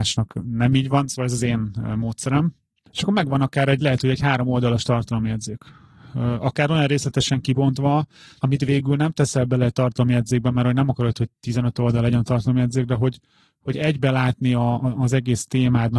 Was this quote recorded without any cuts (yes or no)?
yes